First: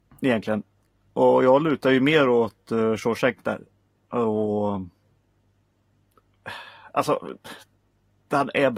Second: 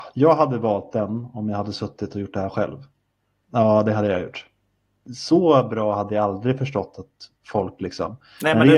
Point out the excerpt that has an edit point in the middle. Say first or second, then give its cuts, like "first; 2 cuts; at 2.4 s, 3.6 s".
second; 2 cuts; at 3.4 s, 5.1 s